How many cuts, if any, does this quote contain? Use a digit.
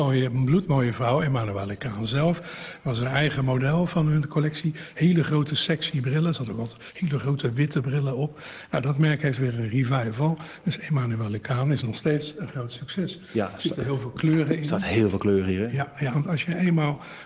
1